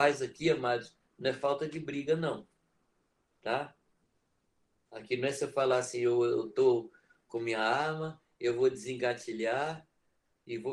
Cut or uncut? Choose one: uncut